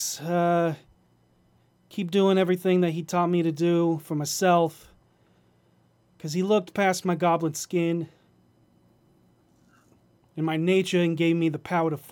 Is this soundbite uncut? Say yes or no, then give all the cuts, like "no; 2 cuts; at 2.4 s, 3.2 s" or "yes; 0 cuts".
yes; 0 cuts